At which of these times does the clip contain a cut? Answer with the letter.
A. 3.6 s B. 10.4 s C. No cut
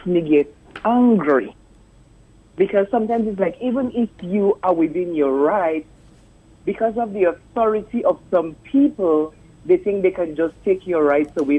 C